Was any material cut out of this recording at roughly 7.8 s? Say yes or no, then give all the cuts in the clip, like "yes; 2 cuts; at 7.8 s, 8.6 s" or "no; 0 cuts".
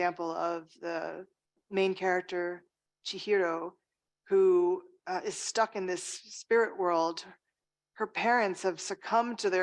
no; 1 cut; at 1.6 s